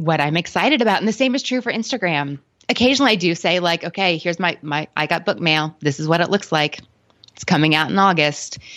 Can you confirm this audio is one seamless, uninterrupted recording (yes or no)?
yes